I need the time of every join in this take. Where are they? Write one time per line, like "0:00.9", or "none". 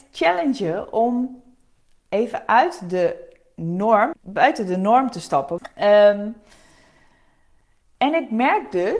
0:04.1
0:05.6

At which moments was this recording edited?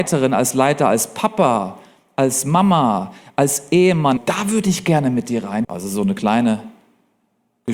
0:04.2
0:05.6

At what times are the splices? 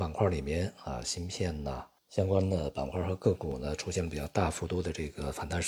0:02.0

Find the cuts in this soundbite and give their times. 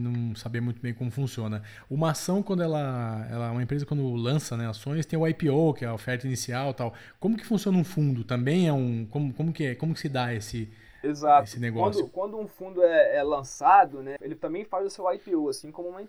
0:14.2

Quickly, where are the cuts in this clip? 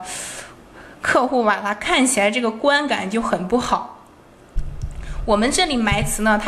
none

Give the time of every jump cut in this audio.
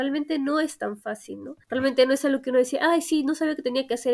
none

